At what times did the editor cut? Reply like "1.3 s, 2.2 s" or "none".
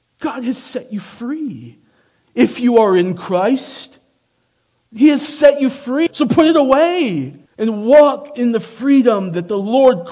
6.1 s, 7.5 s